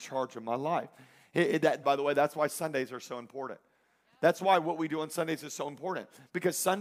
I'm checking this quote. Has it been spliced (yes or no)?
yes